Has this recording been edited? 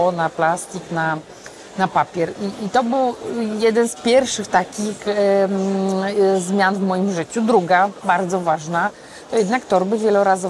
no; 0 cuts

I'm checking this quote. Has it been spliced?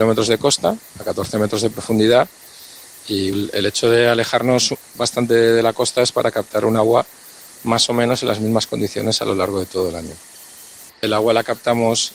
yes; 2 cuts; at 3.3 s, 10.9 s

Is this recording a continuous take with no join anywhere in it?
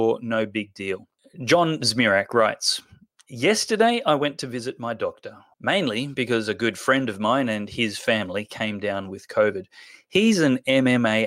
no; 1 cut; at 5.5 s

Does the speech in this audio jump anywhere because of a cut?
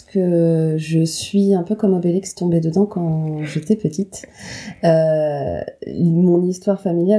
no; 0 cuts

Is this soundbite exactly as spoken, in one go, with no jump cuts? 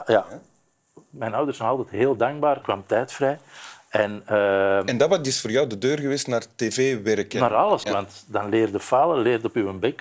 no; 2 cuts; at 2.6 s, 7.8 s

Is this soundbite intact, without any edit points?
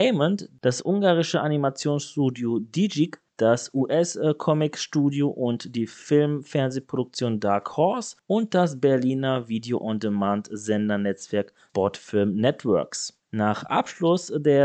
yes; 0 cuts

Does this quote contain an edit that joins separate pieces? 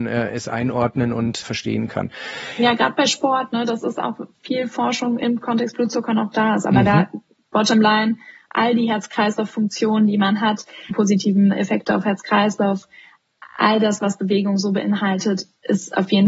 yes; 2 cuts; at 1.4 s, 10.9 s

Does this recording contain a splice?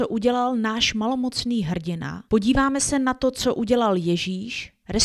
no; 0 cuts

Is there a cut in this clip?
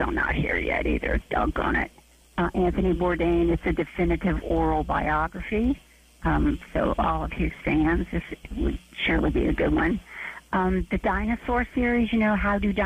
no; 0 cuts

